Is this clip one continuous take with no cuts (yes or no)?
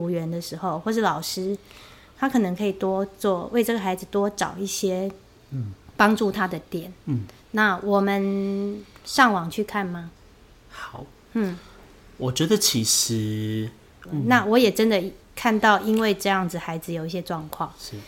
no